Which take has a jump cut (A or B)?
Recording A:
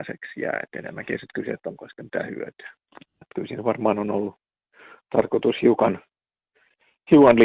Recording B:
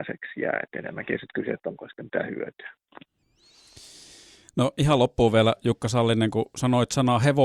A